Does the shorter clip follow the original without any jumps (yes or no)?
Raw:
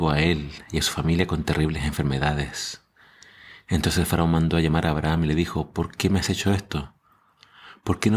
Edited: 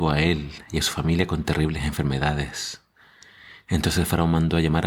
yes